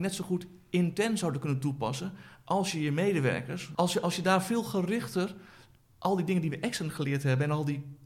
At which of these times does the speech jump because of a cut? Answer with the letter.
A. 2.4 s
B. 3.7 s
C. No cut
B